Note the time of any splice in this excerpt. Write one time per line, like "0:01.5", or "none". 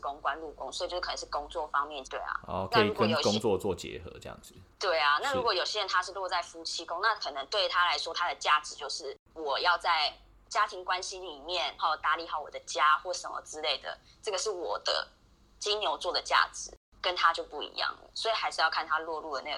0:02.0
0:11.8